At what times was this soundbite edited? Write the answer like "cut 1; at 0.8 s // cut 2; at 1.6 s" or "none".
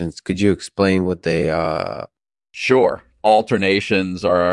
none